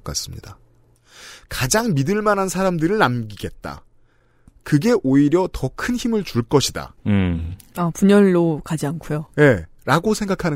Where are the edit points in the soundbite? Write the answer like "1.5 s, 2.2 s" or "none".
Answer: none